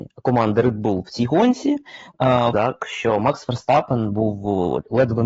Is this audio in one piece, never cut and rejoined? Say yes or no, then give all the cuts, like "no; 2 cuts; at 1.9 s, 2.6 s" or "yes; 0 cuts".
no; 1 cut; at 2.5 s